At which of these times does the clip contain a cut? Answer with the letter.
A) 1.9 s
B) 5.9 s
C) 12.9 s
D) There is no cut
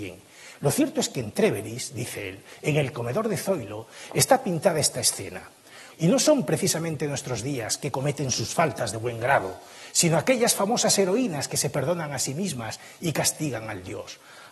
B